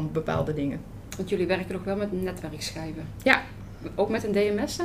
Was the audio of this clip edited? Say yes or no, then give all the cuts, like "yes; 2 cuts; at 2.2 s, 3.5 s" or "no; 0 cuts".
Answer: no; 0 cuts